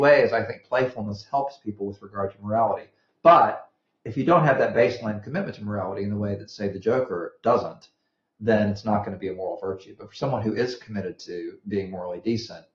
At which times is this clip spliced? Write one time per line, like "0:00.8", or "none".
none